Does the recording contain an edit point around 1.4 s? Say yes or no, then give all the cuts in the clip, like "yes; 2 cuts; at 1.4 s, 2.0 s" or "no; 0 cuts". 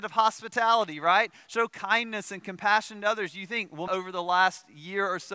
no; 1 cut; at 3.9 s